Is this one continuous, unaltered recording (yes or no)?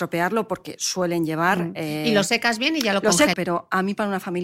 no